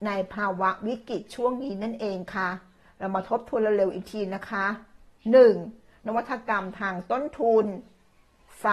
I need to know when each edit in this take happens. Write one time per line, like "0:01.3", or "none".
0:06.0